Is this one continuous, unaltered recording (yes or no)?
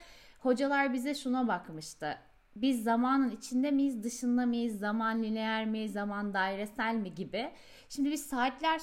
yes